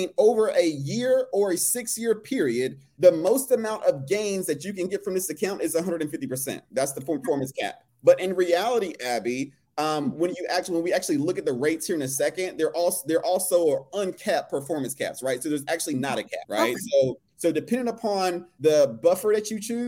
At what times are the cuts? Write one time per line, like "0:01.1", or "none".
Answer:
none